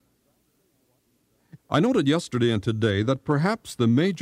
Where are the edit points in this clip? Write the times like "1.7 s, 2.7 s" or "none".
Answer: 1.6 s